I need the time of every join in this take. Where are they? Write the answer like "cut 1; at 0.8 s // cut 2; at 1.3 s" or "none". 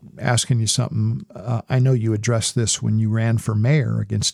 none